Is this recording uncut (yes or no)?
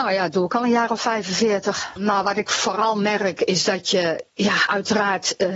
no